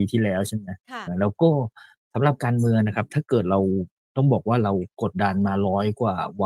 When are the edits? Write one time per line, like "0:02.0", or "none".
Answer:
0:01.1
0:05.1